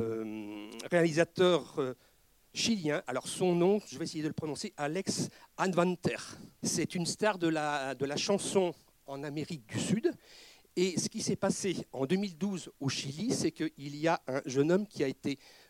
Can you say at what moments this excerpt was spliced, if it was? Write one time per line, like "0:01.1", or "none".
0:06.6